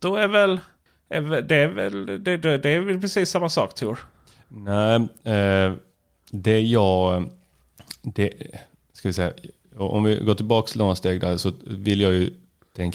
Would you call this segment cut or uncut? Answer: uncut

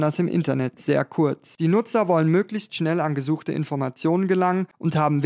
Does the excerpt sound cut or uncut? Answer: uncut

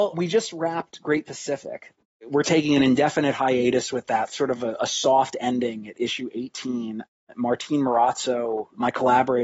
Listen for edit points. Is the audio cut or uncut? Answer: uncut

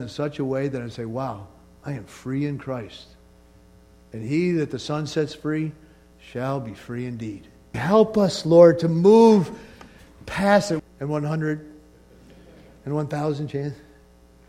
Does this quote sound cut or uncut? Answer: cut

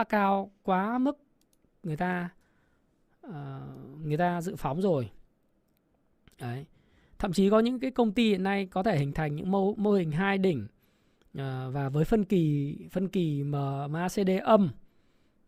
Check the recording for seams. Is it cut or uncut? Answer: uncut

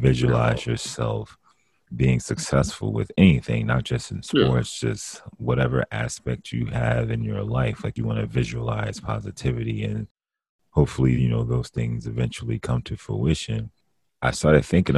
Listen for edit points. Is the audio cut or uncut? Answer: uncut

